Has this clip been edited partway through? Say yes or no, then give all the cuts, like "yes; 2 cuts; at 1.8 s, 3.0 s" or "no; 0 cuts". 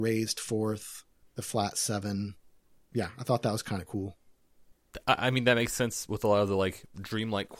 no; 0 cuts